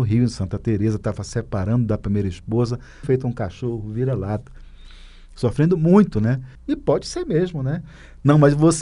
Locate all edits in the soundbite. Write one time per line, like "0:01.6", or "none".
0:03.0
0:06.6